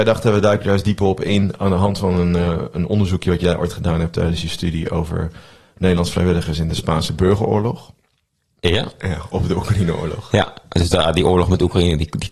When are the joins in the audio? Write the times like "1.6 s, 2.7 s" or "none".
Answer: 9.0 s